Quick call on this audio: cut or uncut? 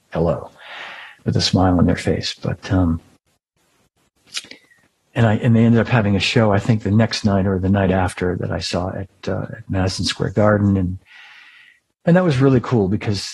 uncut